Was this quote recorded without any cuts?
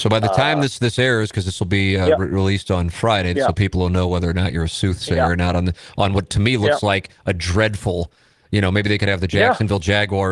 no; 1 cut; at 3.3 s

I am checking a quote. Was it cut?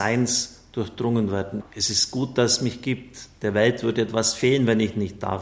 yes; 1 cut; at 1.6 s

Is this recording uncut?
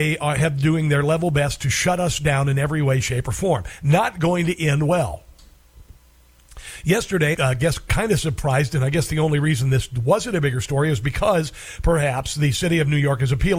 no; 1 cut; at 7.3 s

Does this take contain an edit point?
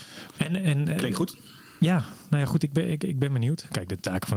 no; 0 cuts

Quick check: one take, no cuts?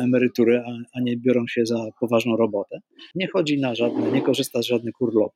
no; 1 cut; at 3.1 s

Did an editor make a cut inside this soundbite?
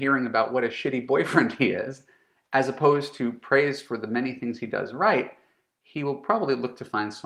no; 0 cuts

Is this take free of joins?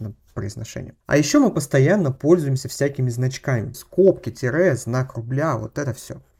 no; 2 cuts; at 1.0 s, 3.7 s

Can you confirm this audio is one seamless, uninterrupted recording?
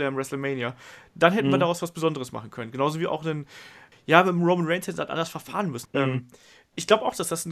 no; 2 cuts; at 3.9 s, 5.9 s

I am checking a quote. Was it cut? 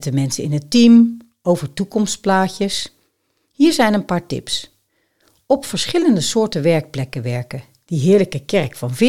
no; 0 cuts

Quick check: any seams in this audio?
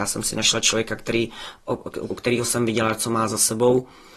yes; 1 cut; at 2.1 s

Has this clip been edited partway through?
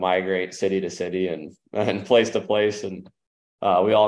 no; 0 cuts

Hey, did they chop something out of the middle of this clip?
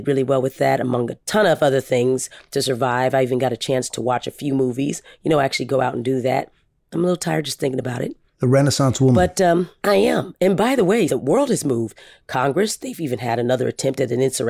yes; 1 cut; at 11.1 s

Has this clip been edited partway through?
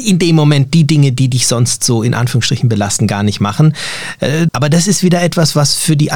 yes; 1 cut; at 4.5 s

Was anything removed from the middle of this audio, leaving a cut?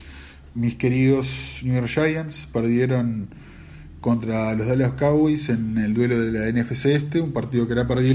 no; 0 cuts

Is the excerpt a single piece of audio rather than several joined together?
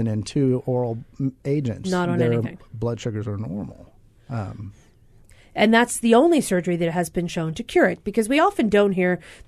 no; 2 cuts; at 1.8 s, 5.2 s

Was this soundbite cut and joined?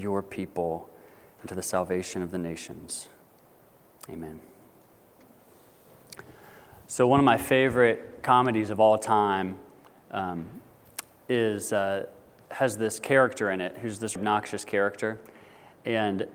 yes; 1 cut; at 14.2 s

